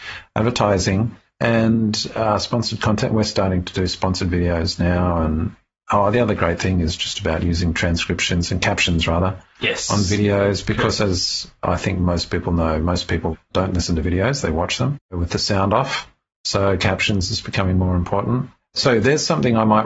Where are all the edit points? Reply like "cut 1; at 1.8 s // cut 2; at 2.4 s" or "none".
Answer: none